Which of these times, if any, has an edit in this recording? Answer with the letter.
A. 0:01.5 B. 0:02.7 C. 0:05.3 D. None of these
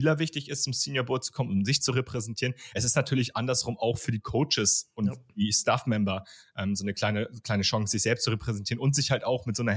D